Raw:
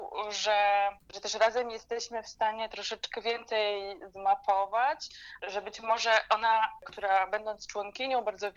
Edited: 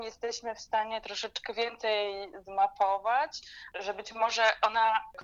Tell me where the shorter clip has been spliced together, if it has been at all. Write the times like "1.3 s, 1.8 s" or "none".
none